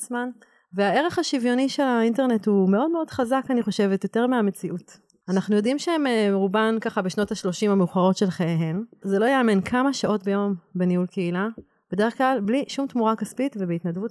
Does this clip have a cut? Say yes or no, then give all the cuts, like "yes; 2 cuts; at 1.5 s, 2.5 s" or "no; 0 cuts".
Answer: yes; 1 cut; at 9.0 s